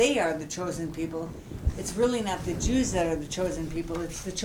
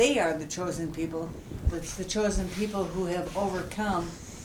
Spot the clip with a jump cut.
second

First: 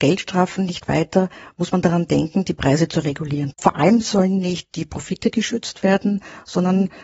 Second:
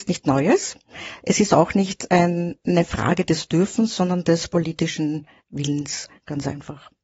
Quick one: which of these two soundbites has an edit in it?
first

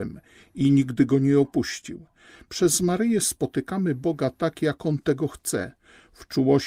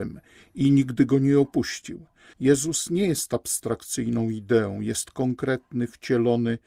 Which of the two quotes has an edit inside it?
second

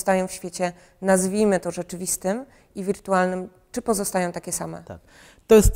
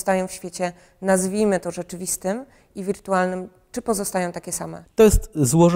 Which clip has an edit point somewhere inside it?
second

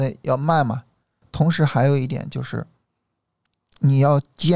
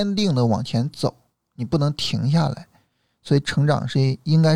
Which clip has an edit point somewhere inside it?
first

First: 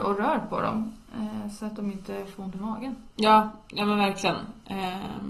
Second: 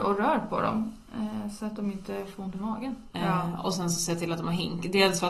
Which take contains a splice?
second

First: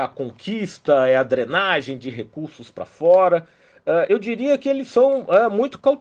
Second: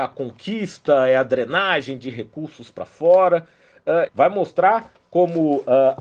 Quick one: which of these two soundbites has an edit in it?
second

